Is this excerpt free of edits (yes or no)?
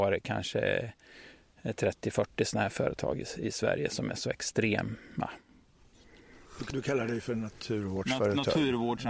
yes